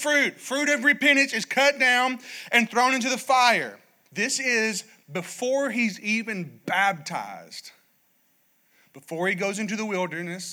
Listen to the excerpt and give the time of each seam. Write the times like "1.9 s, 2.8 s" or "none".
4.1 s